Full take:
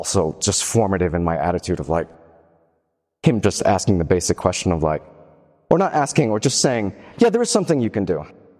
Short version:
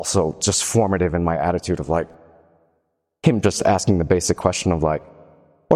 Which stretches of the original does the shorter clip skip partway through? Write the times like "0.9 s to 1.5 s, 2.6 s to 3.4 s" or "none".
none